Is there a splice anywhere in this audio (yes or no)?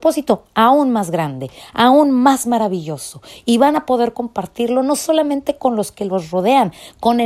no